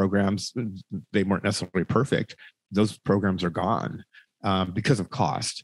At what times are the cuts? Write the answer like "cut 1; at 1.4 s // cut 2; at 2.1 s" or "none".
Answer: none